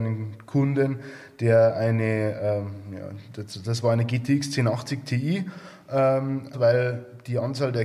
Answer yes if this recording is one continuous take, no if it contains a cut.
no